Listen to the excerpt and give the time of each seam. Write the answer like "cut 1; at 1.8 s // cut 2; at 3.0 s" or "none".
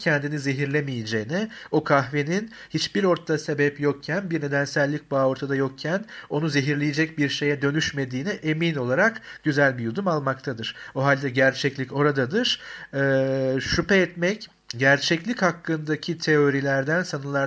none